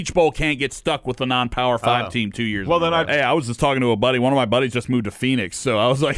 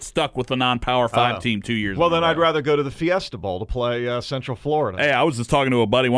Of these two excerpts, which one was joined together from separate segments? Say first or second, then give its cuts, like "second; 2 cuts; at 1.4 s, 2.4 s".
first; 1 cut; at 3.0 s